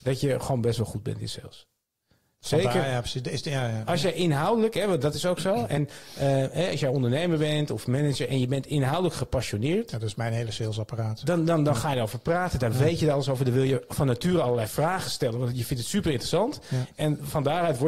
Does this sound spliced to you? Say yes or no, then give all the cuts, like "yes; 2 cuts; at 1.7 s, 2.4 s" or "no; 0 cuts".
no; 0 cuts